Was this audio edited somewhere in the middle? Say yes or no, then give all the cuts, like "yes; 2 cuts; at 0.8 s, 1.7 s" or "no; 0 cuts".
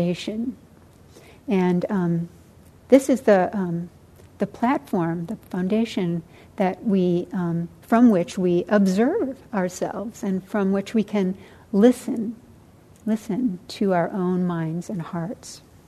no; 0 cuts